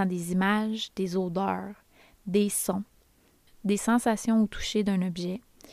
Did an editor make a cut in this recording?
no; 0 cuts

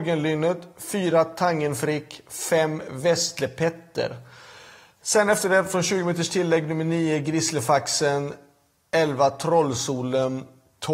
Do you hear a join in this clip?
no; 0 cuts

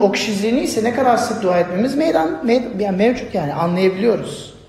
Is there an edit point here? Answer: no; 0 cuts

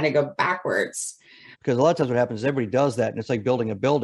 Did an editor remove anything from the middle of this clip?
yes; 1 cut; at 1.5 s

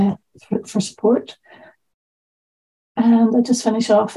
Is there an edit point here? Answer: no; 0 cuts

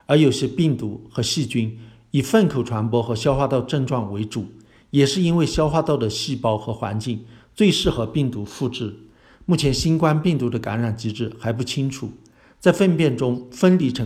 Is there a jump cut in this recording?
no; 0 cuts

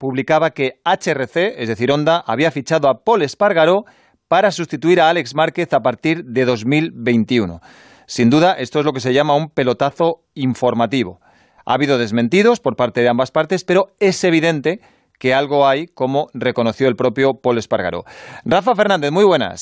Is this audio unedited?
yes; 0 cuts

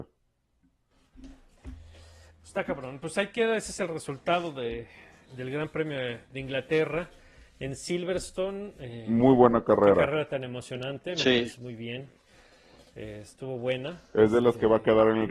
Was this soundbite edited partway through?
no; 0 cuts

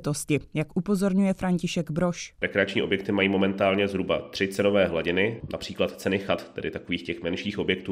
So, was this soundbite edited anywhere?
no; 0 cuts

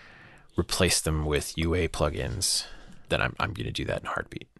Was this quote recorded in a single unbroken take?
no; 1 cut; at 3.1 s

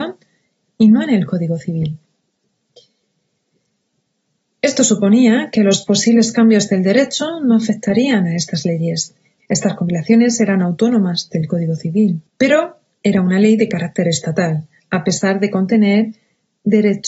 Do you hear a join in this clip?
yes; 2 cuts; at 9.4 s, 12.3 s

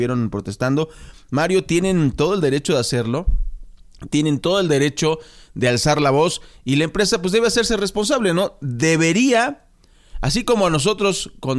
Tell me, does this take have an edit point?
no; 0 cuts

